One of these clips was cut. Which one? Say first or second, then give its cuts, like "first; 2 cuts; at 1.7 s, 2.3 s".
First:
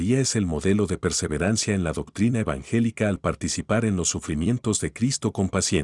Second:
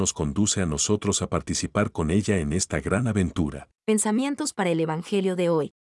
second; 1 cut; at 3.8 s